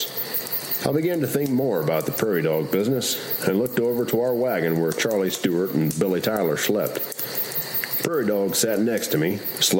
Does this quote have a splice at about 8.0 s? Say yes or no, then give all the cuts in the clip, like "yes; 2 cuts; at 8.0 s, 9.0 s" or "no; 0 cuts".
no; 0 cuts